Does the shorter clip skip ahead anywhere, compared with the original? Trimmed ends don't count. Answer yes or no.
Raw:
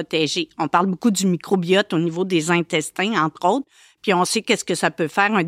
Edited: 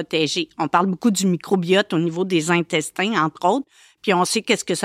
no